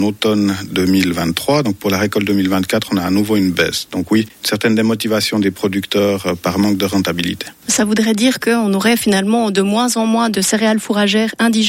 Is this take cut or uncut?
uncut